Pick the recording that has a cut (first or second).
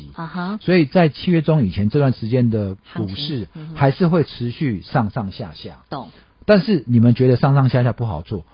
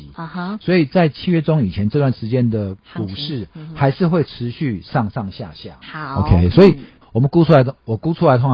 second